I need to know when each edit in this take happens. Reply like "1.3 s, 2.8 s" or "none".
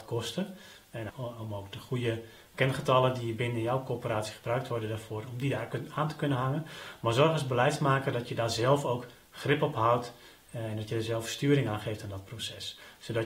1.1 s